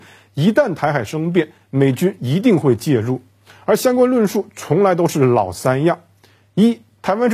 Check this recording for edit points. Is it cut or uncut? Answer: uncut